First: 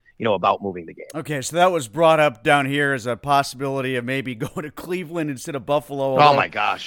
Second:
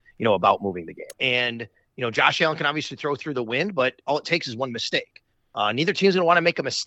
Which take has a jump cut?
second; 1 cut; at 1.1 s

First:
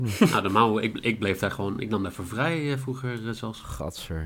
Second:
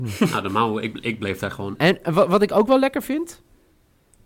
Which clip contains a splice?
second; 1 cut; at 1.8 s

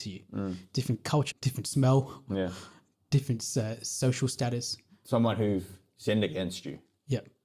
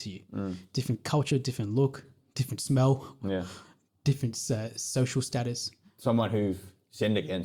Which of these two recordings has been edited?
first; 1 cut; at 1.3 s

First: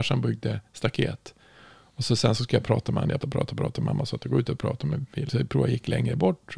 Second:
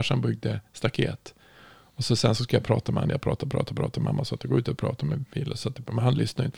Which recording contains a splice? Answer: first; 2 cuts; at 3.2 s, 5.3 s

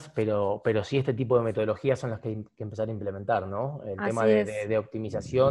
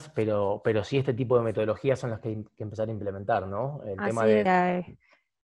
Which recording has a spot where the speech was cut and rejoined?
second; 1 cut; at 4.5 s

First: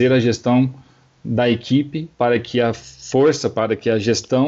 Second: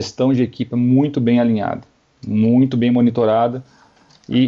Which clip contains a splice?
first; 1 cut; at 2.1 s

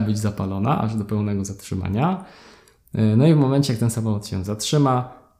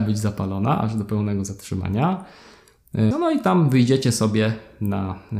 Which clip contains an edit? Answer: second; 1 cut; at 3.1 s

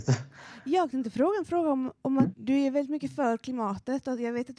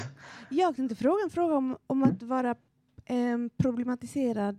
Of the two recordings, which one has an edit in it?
first; 1 cut; at 2.3 s

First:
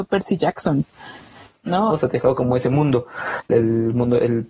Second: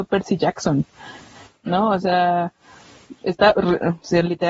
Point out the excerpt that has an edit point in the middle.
first; 2 cuts; at 1.9 s, 3.5 s

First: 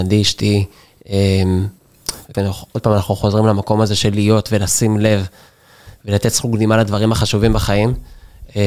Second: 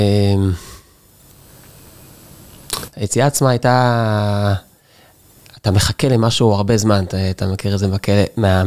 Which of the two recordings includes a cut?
first; 1 cut; at 2.3 s

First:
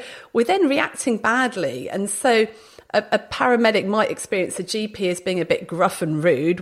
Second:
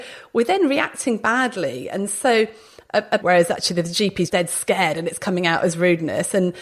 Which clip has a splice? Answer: second; 2 cuts; at 3.2 s, 4.3 s

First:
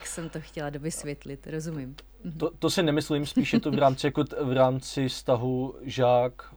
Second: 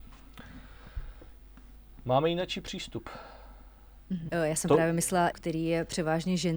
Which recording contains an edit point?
second; 2 cuts; at 4.3 s, 5.3 s

